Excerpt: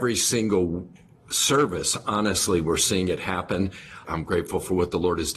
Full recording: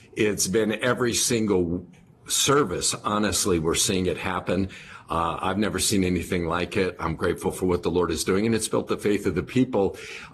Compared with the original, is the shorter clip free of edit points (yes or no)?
no